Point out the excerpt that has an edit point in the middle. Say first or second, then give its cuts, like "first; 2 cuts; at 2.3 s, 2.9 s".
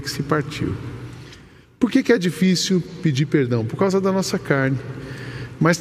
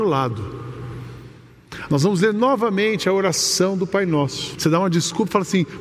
second; 2 cuts; at 1.9 s, 4.6 s